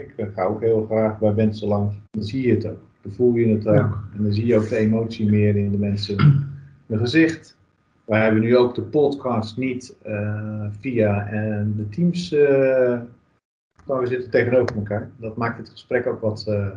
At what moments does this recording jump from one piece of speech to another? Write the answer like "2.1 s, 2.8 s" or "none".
2.1 s, 13.9 s